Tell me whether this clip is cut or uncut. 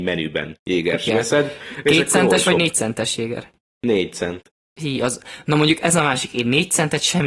cut